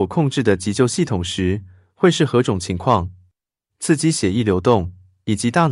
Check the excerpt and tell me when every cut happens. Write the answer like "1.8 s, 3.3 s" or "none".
3.7 s